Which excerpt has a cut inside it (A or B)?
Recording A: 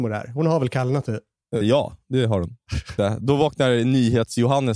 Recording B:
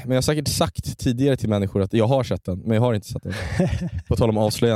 A